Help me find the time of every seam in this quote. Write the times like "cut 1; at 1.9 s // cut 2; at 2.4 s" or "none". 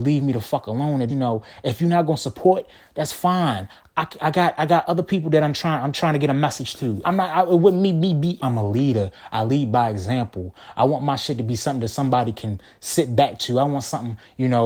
cut 1; at 1.1 s // cut 2; at 7.0 s // cut 3; at 8.4 s